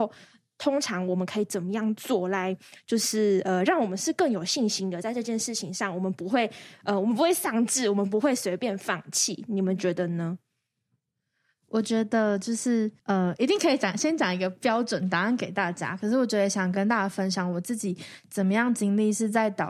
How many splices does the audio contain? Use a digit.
1